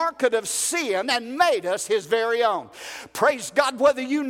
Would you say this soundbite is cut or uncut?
uncut